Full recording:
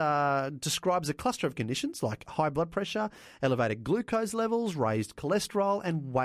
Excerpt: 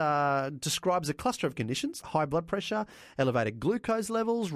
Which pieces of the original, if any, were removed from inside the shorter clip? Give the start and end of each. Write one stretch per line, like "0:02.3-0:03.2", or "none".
0:02.0-0:02.2